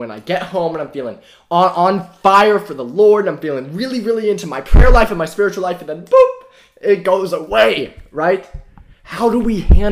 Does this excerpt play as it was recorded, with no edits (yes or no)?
yes